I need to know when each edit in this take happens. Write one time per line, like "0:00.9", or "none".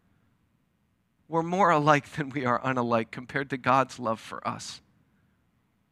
0:01.2

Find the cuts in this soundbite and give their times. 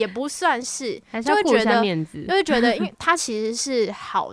0:02.9

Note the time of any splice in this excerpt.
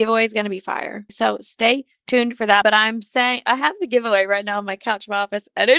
0:01.1
0:02.6

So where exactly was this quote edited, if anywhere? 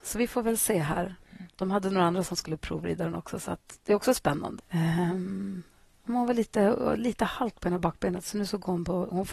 0:04.6

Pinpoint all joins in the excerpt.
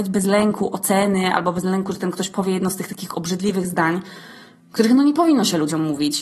none

